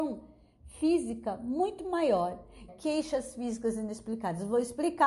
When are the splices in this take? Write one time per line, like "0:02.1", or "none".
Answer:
0:02.7

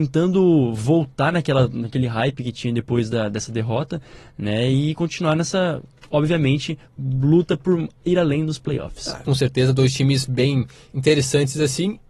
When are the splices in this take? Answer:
0:09.2

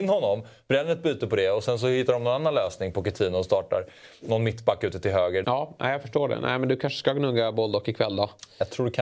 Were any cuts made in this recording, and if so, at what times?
0:05.4

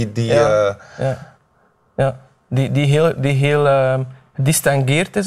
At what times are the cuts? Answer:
none

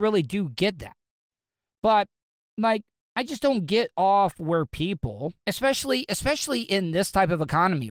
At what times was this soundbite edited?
0:05.4

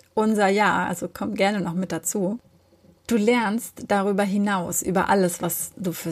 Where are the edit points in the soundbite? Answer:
none

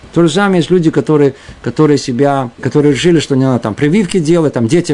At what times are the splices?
0:02.6

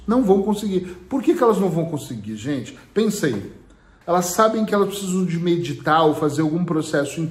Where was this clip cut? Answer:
0:04.0

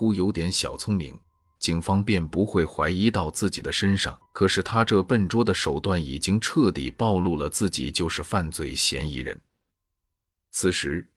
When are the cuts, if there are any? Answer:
0:01.6
0:04.3

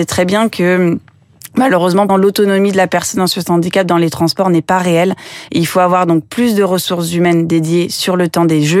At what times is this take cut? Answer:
0:02.1
0:05.5

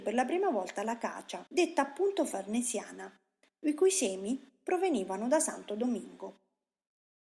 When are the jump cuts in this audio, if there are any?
0:01.5

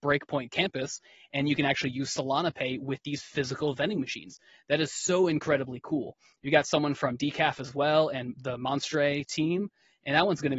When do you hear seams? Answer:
none

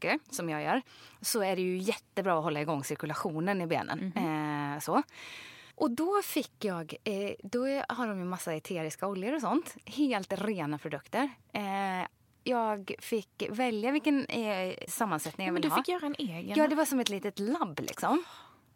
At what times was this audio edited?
0:05.7
0:14.9

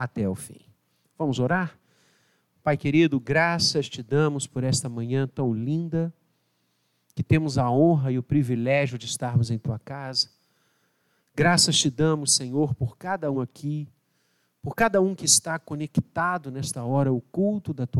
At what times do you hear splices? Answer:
0:13.3

